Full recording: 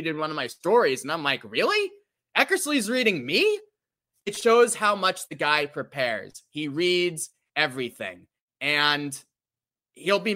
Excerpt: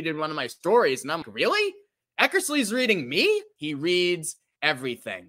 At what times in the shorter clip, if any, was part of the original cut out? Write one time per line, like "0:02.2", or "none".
0:01.2
0:03.6